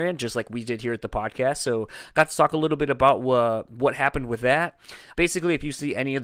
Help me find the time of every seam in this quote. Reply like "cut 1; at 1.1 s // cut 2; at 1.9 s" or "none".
cut 1; at 5.1 s

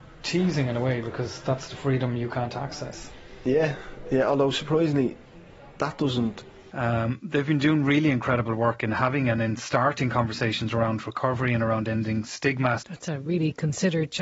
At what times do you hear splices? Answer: cut 1; at 6.7 s // cut 2; at 12.8 s

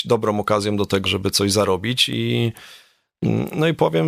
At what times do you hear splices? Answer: cut 1; at 1.1 s

